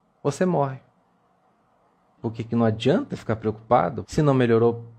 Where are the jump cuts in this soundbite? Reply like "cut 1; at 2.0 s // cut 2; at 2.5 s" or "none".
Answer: cut 1; at 2.2 s // cut 2; at 4.0 s